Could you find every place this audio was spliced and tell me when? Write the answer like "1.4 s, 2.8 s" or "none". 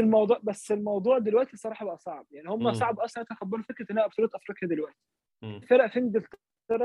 5.6 s